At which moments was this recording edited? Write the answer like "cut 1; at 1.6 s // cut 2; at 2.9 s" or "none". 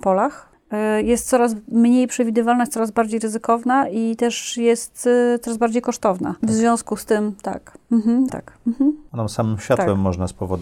cut 1; at 6.4 s // cut 2; at 8.3 s